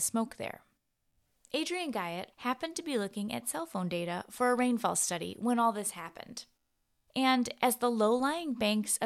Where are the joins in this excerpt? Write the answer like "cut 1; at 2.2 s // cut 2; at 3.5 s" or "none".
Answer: cut 1; at 2.3 s